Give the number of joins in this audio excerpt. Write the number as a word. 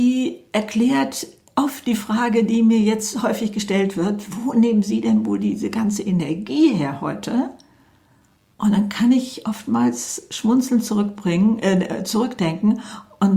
zero